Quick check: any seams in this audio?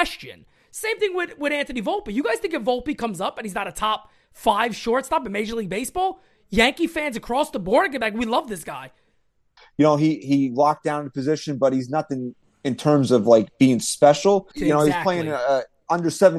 yes; 2 cuts; at 9.6 s, 14.5 s

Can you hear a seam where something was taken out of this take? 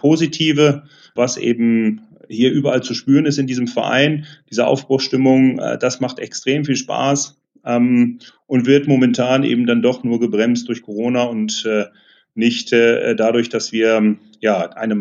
yes; 1 cut; at 1.2 s

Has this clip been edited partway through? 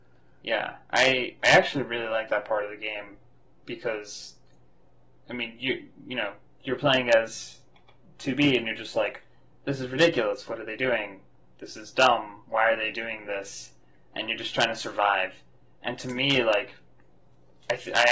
no; 0 cuts

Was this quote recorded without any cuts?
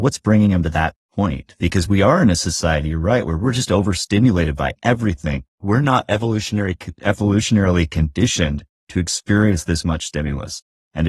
no; 1 cut; at 5.6 s

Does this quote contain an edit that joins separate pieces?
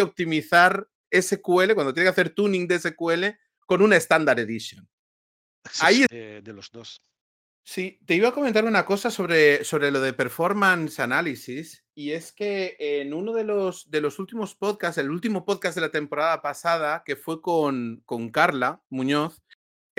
yes; 1 cut; at 6.1 s

